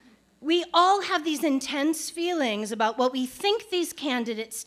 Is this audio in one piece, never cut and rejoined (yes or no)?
yes